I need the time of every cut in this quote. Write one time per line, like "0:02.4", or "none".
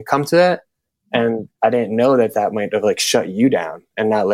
0:01.5